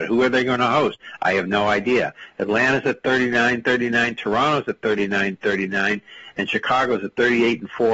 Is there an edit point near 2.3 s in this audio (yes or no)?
no